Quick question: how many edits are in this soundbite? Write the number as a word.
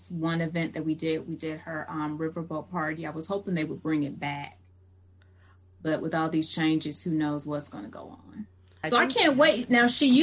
one